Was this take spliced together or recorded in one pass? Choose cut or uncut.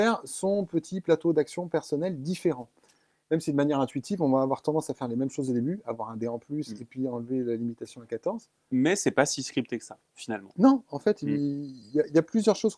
uncut